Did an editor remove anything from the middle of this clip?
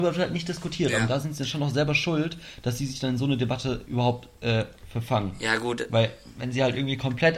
no; 0 cuts

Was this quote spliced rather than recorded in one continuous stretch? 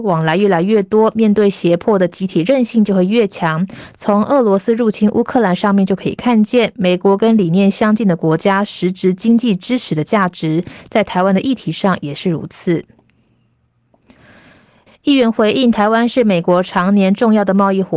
yes; 1 cut; at 14.9 s

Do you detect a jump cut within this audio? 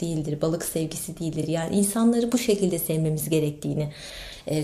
no; 0 cuts

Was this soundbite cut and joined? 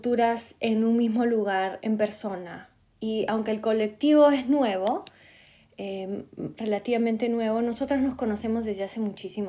no; 0 cuts

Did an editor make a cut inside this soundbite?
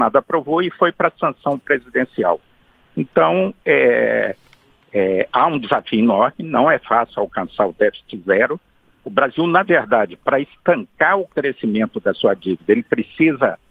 no; 0 cuts

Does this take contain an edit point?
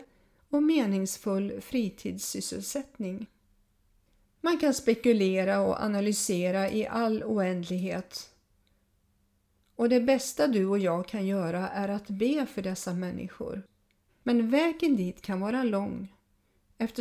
yes; 2 cuts; at 4.3 s, 14.1 s

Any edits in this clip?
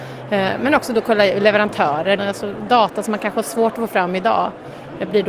yes; 1 cut; at 2.2 s

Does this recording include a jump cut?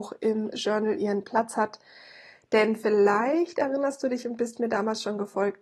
no; 0 cuts

